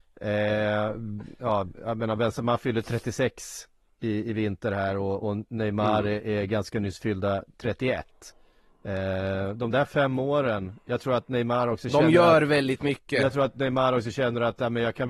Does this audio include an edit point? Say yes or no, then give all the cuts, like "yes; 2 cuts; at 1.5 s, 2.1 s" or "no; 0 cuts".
no; 0 cuts